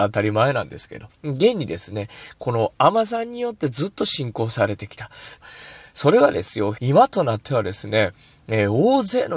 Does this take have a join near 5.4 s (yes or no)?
yes